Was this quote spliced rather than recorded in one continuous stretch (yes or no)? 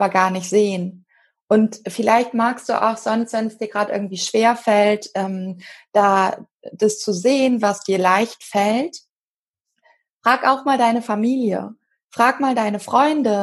no